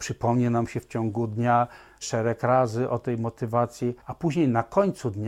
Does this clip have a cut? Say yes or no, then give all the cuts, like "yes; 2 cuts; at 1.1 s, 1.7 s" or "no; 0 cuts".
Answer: yes; 2 cuts; at 2.0 s, 4.0 s